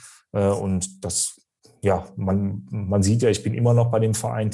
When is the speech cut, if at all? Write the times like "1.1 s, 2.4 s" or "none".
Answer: none